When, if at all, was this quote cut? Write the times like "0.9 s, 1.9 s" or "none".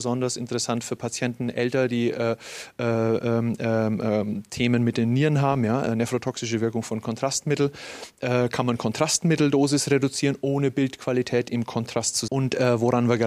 12.3 s